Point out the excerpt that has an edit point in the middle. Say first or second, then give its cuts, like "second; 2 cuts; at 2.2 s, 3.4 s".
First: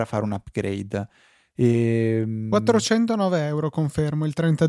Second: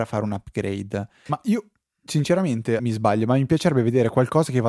second; 2 cuts; at 1.3 s, 2.8 s